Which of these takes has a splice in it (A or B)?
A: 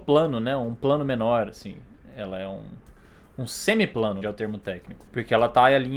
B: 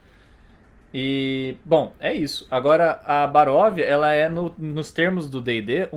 A